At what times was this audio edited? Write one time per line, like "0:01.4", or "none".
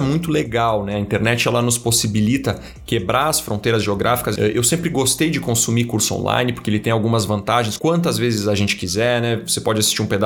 0:04.4
0:07.8

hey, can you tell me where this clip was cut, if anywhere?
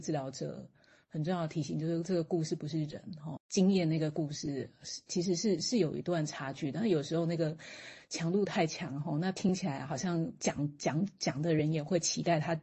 0:03.4

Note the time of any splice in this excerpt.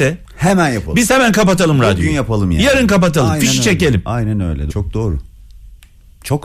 0:04.7

